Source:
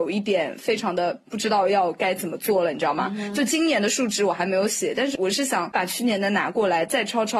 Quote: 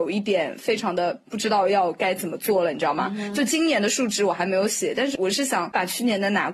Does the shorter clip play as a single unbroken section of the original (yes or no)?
yes